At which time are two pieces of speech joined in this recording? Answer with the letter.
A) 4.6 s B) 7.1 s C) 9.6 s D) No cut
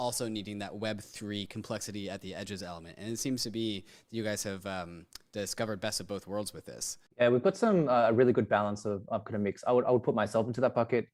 B